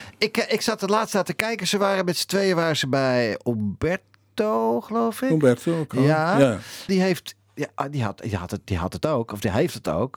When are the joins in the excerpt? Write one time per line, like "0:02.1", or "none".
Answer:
0:06.9